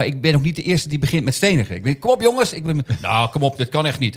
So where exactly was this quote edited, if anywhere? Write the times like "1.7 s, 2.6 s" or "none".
none